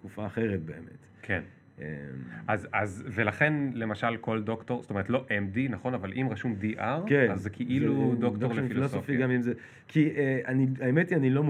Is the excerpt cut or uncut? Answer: uncut